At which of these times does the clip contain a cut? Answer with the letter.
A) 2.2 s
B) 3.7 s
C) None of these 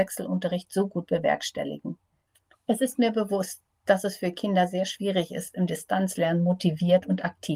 C